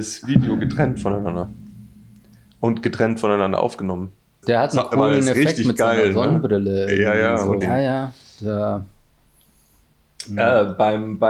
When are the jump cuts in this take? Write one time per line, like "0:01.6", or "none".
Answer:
0:04.4
0:07.6